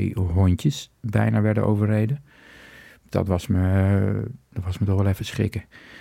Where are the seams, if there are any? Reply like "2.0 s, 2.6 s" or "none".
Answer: 4.5 s